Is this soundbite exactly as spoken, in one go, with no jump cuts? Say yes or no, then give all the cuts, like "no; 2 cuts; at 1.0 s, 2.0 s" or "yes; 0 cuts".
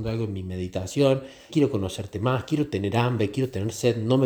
no; 1 cut; at 1.5 s